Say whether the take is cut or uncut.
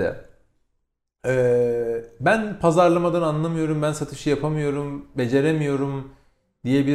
uncut